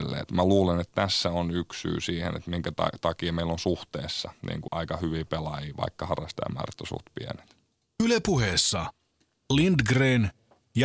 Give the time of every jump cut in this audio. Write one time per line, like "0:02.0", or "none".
0:04.7